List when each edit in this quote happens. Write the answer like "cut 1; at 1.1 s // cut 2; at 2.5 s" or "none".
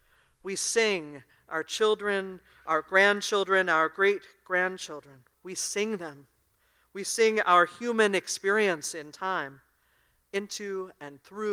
cut 1; at 5.3 s